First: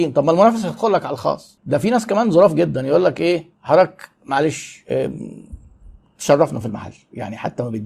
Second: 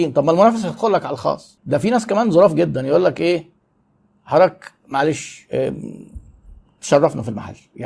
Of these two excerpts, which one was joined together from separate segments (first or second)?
first